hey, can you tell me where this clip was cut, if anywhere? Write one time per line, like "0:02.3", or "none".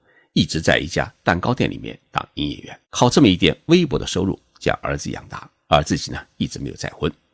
0:02.8